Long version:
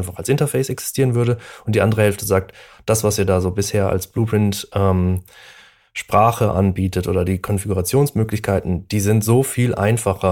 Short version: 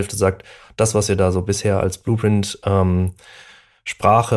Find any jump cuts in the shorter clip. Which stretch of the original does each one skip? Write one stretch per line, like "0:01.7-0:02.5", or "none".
none